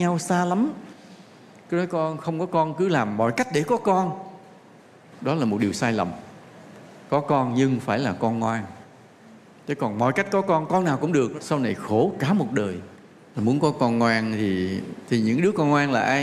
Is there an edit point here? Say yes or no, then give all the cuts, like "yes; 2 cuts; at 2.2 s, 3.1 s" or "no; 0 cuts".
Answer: yes; 2 cuts; at 11.4 s, 13.3 s